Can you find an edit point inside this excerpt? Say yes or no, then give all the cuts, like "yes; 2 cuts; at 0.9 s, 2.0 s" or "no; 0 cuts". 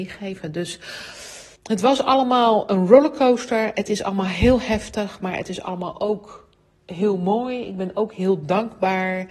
yes; 1 cut; at 1.6 s